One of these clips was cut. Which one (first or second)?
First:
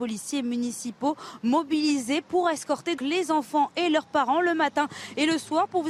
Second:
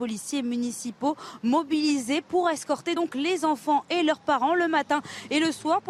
first